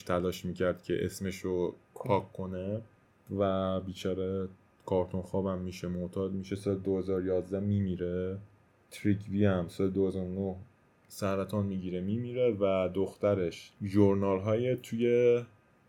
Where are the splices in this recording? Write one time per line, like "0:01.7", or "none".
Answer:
0:01.9
0:13.7